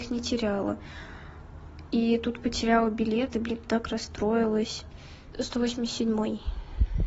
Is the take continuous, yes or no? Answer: no